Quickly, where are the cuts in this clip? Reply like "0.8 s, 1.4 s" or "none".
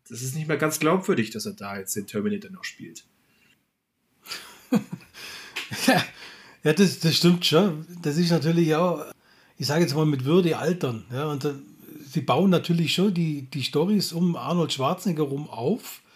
none